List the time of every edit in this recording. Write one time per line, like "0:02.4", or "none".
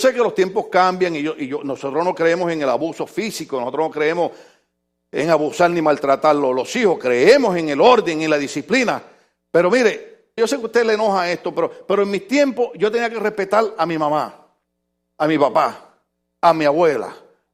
0:10.4